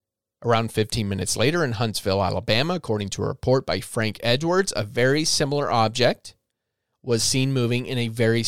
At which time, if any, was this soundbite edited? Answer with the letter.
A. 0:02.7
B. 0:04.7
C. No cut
C